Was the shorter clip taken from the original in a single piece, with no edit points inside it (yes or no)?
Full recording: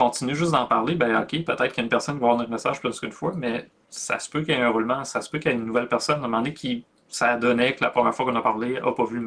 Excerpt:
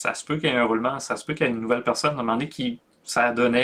yes